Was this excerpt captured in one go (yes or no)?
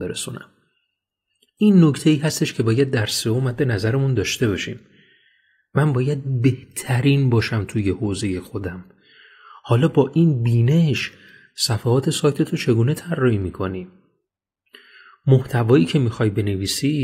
yes